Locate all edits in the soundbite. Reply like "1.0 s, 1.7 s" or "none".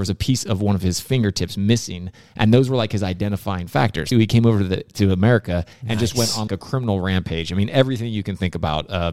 4.1 s, 6.5 s